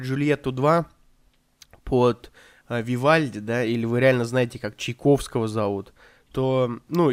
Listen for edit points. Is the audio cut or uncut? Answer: uncut